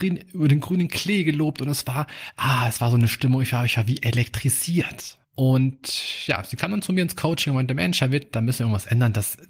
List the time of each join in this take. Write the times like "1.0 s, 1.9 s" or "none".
5.2 s